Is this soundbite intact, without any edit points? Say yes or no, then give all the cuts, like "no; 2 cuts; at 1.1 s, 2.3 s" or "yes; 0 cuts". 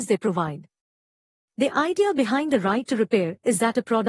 yes; 0 cuts